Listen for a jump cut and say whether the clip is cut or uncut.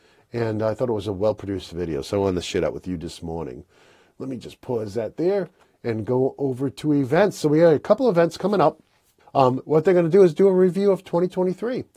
cut